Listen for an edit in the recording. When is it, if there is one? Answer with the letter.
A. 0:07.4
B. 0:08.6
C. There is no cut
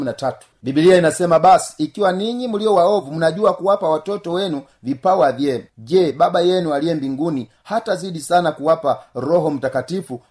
C